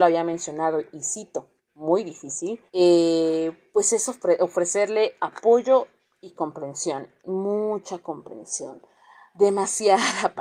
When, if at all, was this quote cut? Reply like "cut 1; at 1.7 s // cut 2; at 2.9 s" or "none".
cut 1; at 2.7 s